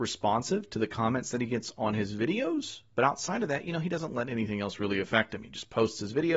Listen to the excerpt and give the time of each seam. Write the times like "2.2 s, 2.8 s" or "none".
none